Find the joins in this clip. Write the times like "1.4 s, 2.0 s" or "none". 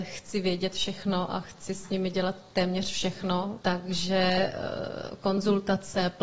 3.6 s